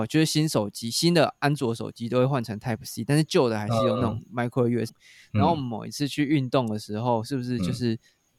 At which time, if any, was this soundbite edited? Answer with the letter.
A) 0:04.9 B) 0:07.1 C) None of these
A